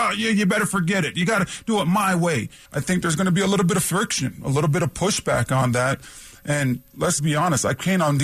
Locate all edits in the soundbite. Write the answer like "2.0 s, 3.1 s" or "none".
2.6 s, 7.2 s